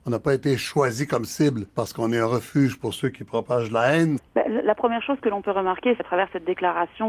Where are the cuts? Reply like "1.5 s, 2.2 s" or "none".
1.7 s, 4.2 s, 6.0 s